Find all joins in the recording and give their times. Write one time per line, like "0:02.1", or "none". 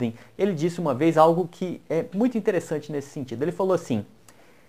0:02.1